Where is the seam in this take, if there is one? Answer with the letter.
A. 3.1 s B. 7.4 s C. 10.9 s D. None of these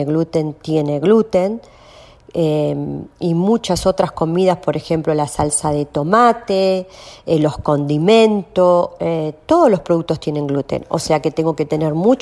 D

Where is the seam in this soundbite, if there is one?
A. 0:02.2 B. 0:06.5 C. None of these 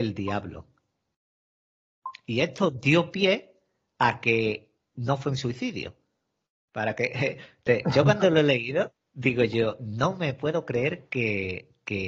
B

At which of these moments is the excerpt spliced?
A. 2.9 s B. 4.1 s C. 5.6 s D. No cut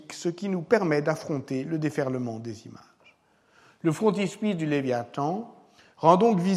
D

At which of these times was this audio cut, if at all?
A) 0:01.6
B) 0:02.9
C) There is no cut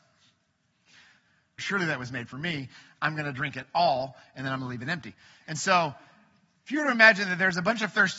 A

